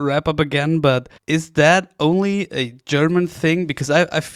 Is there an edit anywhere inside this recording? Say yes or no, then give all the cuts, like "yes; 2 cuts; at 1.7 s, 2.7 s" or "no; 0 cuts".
yes; 1 cut; at 1.2 s